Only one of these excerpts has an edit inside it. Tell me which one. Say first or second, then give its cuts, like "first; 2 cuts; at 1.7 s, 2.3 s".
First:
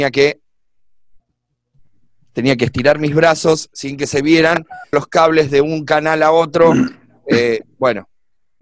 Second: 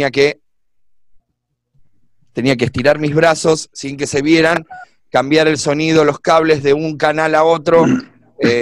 first; 1 cut; at 4.9 s